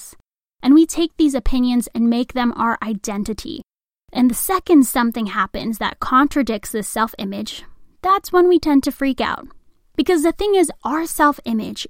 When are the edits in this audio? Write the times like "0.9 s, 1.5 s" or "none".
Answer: 9.9 s

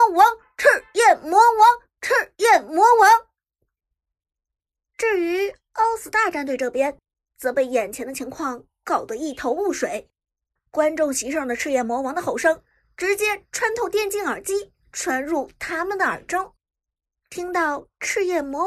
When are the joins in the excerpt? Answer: none

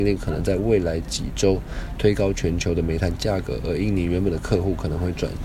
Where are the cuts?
none

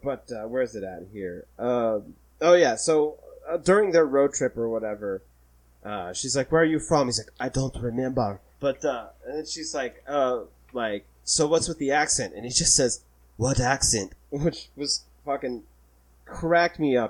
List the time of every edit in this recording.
8.5 s

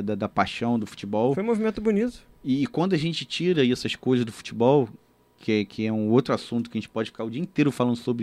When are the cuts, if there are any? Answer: none

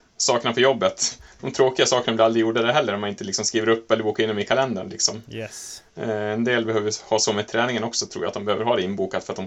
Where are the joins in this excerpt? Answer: none

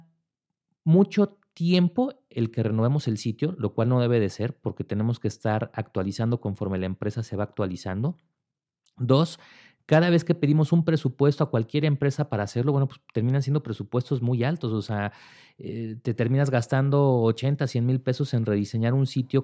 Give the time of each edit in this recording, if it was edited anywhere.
none

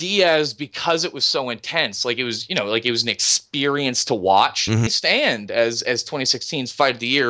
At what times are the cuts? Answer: 4.9 s

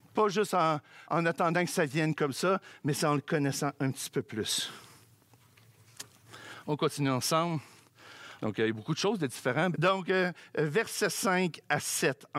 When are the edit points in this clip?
1.1 s, 8.4 s, 9.7 s

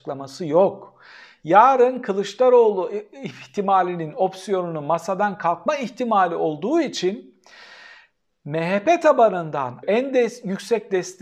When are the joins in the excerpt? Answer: 9.8 s

